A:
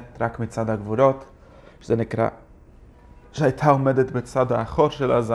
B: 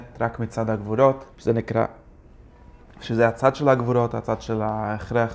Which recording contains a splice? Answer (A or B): B